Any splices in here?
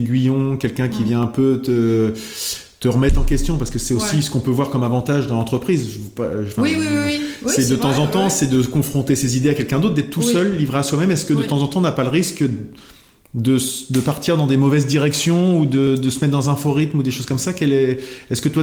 no; 0 cuts

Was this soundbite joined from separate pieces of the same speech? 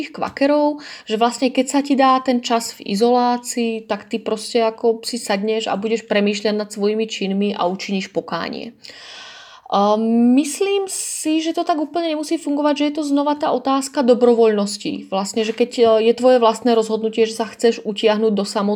no; 0 cuts

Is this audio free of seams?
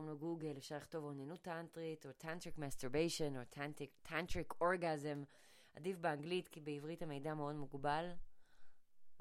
yes; 0 cuts

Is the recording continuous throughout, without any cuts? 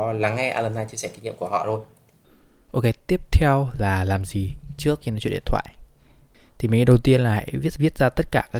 no; 1 cut; at 5.0 s

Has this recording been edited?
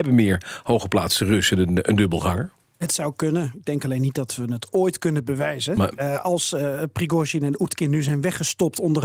no; 0 cuts

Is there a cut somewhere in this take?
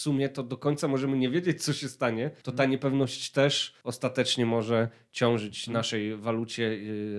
no; 0 cuts

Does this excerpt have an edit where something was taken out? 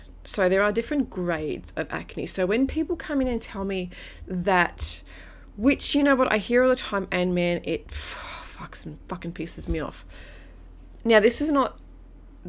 no; 0 cuts

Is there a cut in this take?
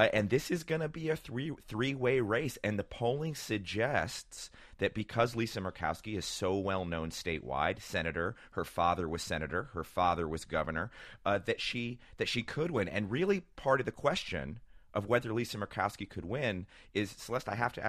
no; 0 cuts

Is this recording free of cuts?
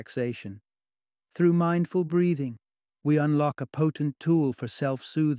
no; 1 cut; at 1.2 s

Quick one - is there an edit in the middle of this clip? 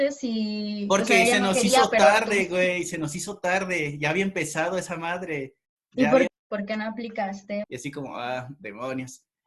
yes; 2 cuts; at 6.3 s, 7.6 s

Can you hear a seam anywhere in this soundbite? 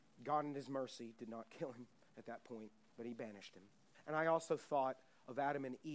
yes; 1 cut; at 3.9 s

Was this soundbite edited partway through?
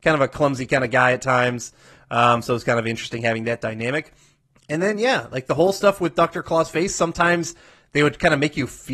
no; 0 cuts

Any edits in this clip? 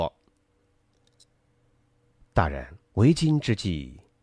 yes; 1 cut; at 2.8 s

